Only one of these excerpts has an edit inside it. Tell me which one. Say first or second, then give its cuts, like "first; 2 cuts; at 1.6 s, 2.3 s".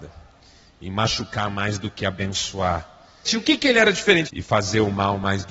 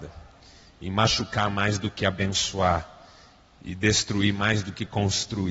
first; 2 cuts; at 3.3 s, 4.3 s